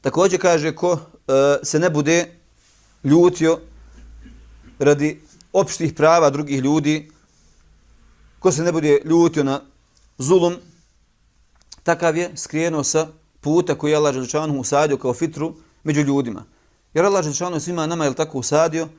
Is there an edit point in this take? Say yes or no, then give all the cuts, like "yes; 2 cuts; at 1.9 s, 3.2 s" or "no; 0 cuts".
no; 0 cuts